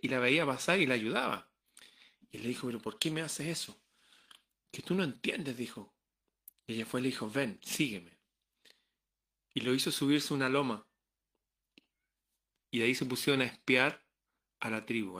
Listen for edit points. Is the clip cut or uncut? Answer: cut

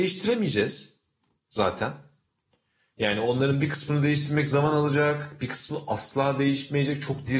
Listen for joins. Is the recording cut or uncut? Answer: uncut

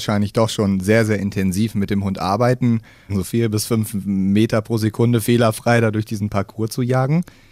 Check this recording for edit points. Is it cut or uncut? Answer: cut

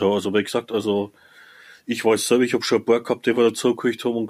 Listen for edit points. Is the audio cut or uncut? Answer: uncut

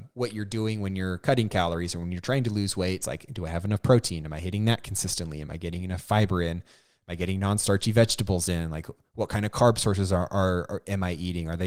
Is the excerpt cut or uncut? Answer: uncut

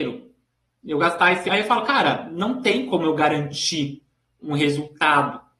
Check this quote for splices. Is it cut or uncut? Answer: cut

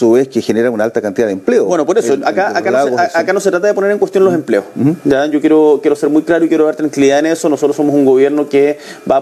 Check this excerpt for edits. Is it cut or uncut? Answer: uncut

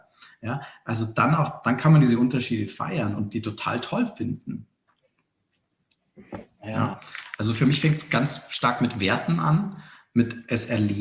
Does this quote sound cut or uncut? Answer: uncut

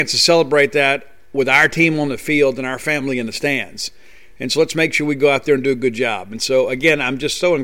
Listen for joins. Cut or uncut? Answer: uncut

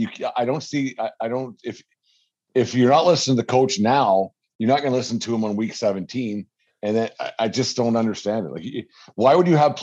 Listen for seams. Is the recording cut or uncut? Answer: uncut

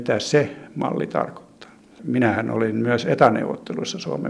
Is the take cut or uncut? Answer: uncut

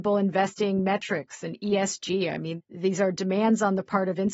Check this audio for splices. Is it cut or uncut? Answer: uncut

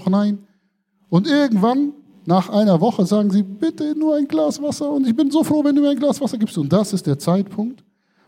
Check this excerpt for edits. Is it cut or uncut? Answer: uncut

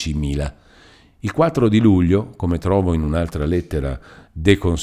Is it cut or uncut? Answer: uncut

